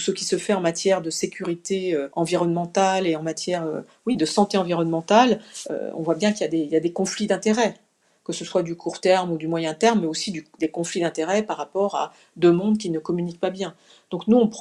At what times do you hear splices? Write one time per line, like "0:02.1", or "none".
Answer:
none